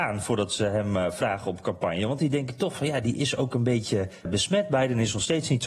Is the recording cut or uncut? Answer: cut